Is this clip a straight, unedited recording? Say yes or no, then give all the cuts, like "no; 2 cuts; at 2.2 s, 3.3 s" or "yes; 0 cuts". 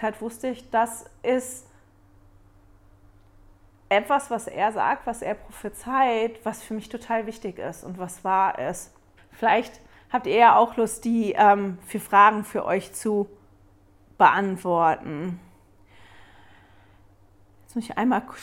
no; 1 cut; at 9.2 s